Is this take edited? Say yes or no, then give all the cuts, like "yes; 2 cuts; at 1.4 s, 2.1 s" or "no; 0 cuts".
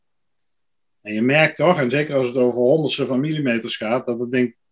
no; 0 cuts